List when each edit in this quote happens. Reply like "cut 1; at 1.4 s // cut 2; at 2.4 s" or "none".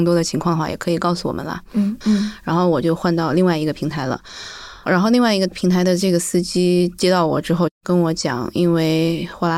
cut 1; at 2.0 s